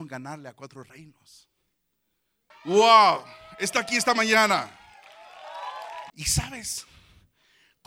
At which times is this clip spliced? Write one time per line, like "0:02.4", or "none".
0:02.5
0:06.1